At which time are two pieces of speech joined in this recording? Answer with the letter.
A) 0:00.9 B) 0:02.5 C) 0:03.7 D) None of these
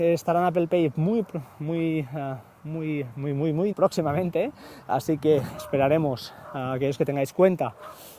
C